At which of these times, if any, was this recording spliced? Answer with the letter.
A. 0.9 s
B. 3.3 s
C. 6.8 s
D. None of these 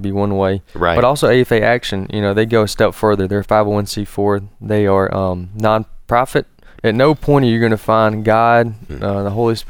C